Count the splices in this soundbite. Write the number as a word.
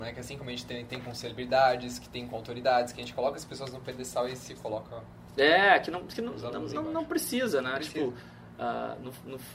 zero